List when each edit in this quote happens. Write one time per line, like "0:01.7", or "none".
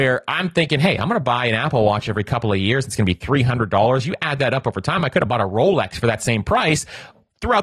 none